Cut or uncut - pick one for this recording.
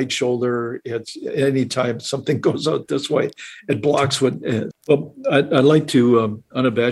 cut